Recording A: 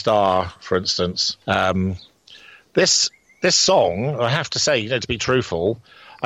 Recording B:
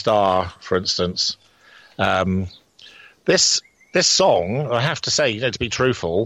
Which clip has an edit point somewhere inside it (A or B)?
A